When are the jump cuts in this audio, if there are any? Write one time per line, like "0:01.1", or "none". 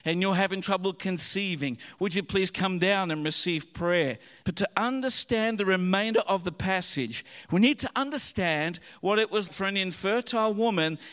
0:04.4
0:09.5